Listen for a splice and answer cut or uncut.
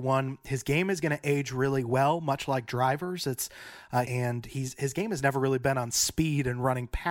cut